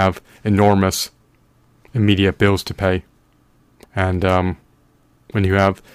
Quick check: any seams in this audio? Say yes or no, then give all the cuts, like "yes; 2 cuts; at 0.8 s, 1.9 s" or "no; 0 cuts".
yes; 1 cut; at 3.8 s